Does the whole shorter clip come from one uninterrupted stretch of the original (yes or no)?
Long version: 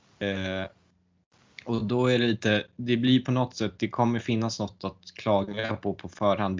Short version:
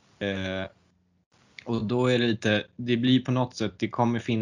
yes